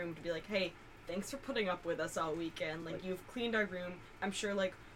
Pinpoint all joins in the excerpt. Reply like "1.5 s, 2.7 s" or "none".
none